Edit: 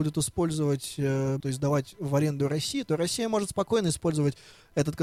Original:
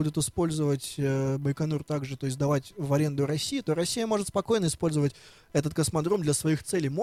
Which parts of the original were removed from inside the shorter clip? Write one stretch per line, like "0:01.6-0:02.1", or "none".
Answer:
0:01.4-0:02.2